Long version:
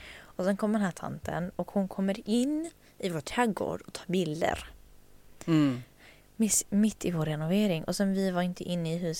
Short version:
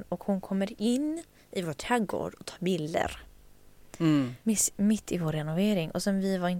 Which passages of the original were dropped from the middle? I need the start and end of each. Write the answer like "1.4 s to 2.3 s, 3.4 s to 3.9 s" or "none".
5.9 s to 6.3 s